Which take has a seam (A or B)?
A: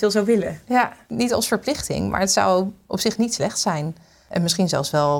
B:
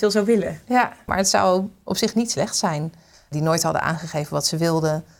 B